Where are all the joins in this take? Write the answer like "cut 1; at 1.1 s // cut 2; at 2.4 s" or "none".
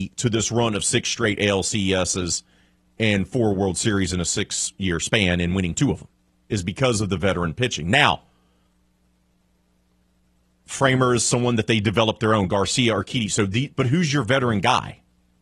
cut 1; at 13.7 s